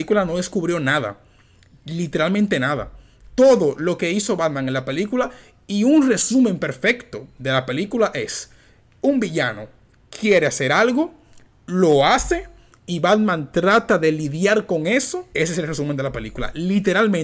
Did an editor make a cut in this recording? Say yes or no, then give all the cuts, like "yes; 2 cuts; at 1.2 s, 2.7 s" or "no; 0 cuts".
yes; 1 cut; at 15.3 s